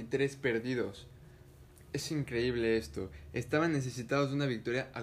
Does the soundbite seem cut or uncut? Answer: uncut